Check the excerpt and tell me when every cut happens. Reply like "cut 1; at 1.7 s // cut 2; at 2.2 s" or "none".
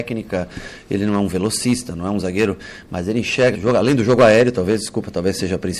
cut 1; at 3.5 s